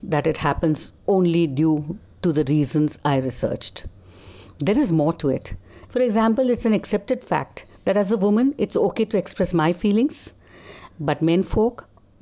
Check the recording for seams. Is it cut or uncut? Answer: cut